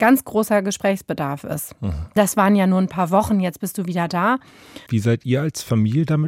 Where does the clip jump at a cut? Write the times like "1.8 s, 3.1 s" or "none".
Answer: 2.2 s, 4.9 s